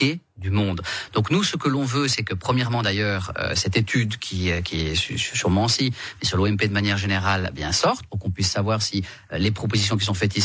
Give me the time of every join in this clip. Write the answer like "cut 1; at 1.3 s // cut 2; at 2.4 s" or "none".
none